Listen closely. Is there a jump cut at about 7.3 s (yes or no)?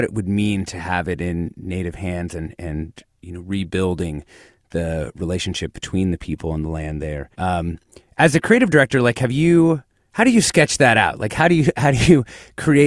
yes